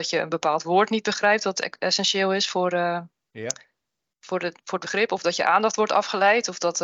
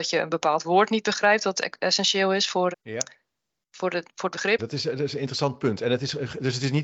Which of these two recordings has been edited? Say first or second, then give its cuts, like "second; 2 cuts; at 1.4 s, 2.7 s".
second; 2 cuts; at 2.7 s, 4.6 s